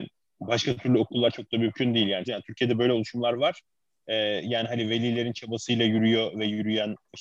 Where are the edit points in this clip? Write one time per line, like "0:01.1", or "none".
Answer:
0:02.2

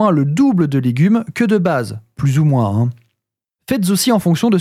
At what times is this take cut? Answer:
0:03.6

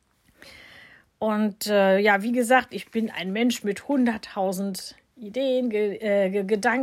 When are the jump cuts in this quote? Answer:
none

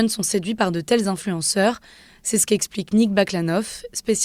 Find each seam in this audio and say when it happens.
none

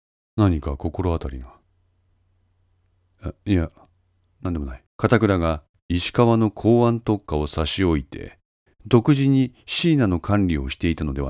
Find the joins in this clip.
0:04.9

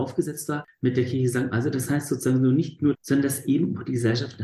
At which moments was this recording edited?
0:01.5
0:02.9

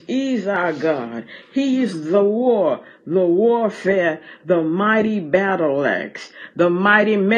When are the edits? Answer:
none

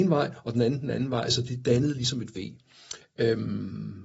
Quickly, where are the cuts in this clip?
0:03.0

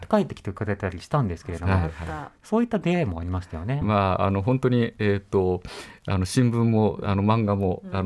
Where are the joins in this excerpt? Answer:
0:03.8

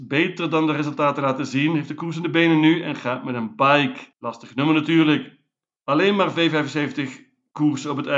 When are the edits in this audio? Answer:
0:04.1
0:05.8

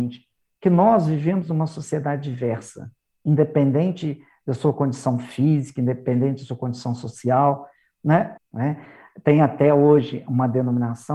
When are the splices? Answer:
0:08.4

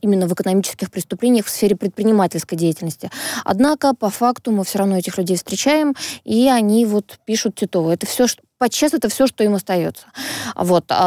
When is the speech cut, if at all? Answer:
none

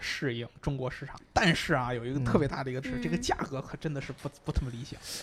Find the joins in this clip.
0:01.2
0:02.8

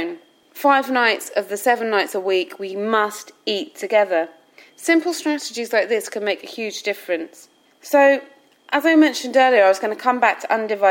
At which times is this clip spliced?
0:07.6

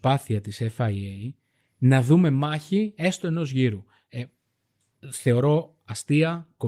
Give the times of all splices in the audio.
none

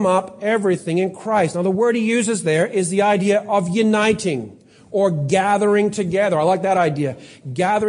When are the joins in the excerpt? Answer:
none

